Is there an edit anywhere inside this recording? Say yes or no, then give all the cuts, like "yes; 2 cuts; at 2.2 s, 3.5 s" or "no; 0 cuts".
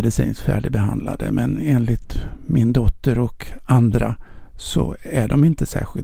no; 0 cuts